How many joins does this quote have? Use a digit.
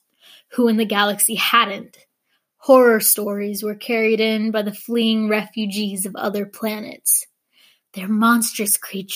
0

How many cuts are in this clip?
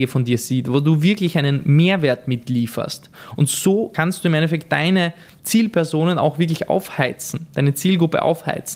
0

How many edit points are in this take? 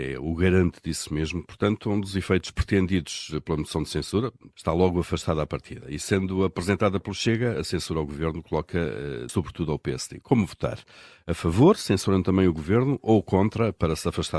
2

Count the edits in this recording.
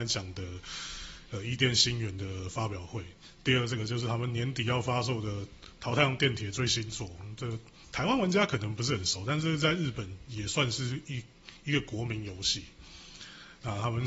0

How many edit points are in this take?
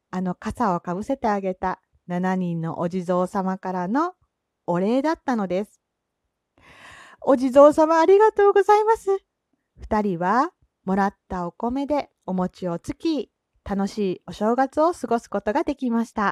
2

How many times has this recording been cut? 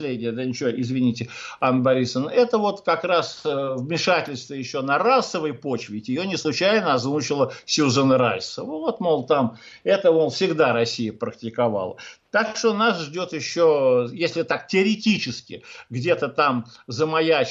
0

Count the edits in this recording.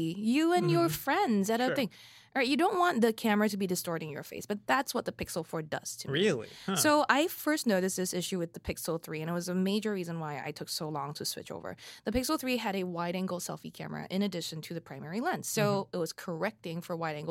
0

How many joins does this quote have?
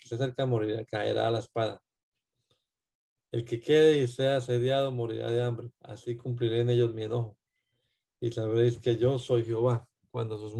1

